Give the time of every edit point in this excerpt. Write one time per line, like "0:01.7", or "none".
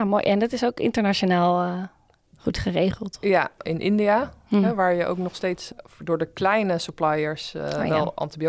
0:03.7